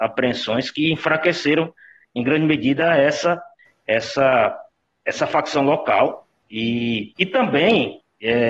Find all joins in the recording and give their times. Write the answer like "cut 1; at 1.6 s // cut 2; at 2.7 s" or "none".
cut 1; at 6.4 s